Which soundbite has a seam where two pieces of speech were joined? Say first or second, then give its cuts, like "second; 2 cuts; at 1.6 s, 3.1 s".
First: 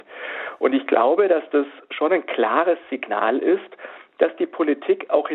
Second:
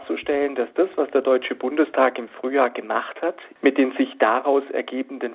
second; 1 cut; at 3.6 s